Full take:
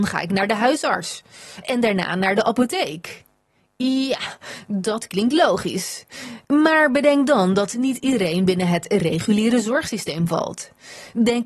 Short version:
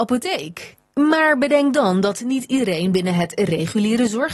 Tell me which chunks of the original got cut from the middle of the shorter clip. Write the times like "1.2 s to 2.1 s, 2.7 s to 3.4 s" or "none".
3.4 s to 6.5 s